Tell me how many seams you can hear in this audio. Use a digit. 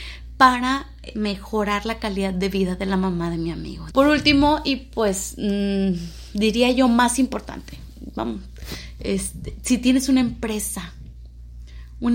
1